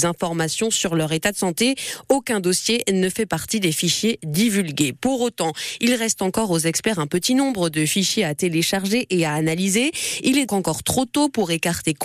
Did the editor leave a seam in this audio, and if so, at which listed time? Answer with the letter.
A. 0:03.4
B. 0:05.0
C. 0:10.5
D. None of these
C